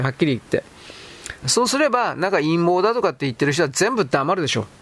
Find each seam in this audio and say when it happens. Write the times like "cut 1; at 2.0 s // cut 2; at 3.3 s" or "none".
cut 1; at 1.4 s

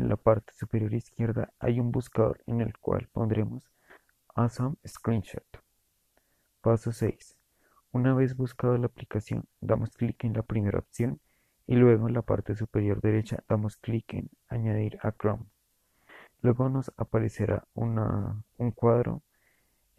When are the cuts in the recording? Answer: none

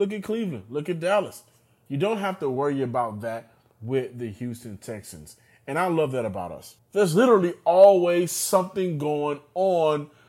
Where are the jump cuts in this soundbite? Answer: cut 1; at 1.9 s // cut 2; at 6.8 s

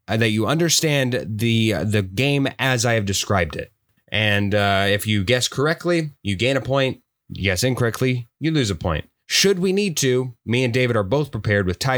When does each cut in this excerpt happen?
cut 1; at 4.0 s

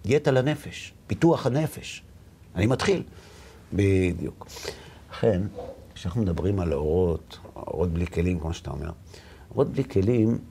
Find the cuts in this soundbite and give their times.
cut 1; at 1.0 s // cut 2; at 3.7 s

